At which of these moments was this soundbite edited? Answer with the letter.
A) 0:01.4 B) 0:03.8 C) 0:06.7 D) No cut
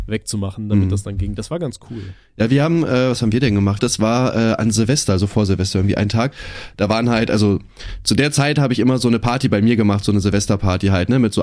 B